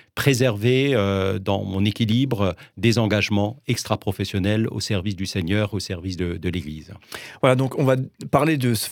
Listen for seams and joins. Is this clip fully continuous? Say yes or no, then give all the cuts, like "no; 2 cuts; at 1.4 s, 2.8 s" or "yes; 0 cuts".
yes; 0 cuts